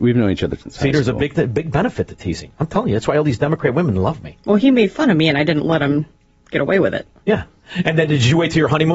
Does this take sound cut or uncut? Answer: uncut